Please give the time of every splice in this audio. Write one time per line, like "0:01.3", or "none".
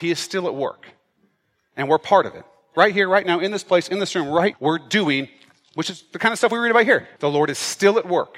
0:04.5
0:07.2